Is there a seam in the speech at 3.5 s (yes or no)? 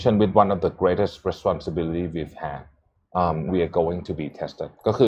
yes